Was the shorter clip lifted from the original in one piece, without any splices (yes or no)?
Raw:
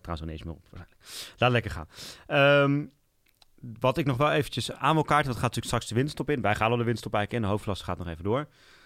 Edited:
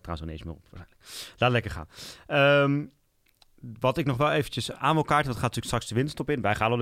yes